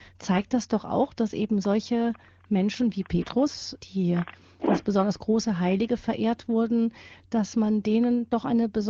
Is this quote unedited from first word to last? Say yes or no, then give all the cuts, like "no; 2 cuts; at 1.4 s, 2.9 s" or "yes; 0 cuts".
no; 1 cut; at 3.8 s